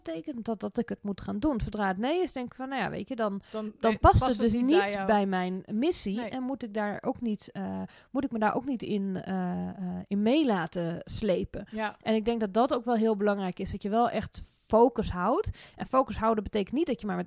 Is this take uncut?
yes; 0 cuts

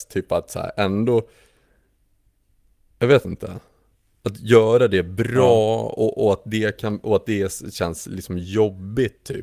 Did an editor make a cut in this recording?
no; 0 cuts

